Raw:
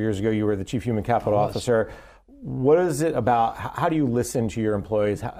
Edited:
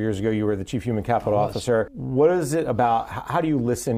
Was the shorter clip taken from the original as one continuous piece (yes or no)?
no